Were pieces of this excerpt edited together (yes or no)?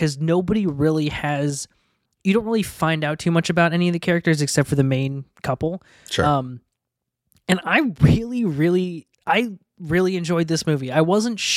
yes